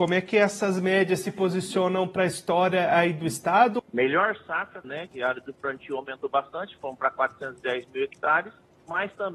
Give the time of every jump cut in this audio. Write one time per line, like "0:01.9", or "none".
0:03.8
0:04.8